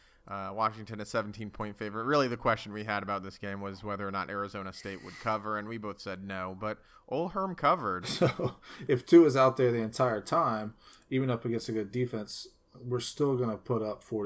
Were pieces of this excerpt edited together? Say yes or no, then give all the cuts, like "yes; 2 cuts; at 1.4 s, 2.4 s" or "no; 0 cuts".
yes; 1 cut; at 8.0 s